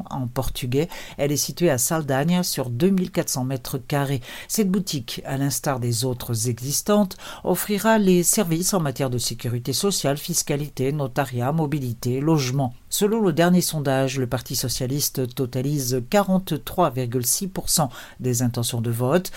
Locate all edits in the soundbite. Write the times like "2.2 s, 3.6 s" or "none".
12.9 s